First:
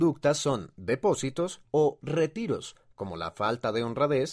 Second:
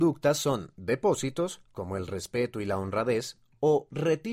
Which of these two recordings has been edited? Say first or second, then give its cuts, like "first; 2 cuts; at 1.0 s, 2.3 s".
first; 1 cut; at 1.6 s